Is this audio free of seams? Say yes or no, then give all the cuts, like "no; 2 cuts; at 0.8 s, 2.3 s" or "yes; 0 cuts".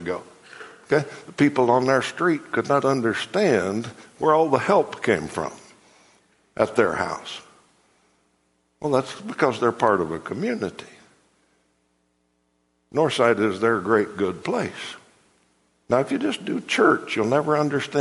no; 1 cut; at 15.8 s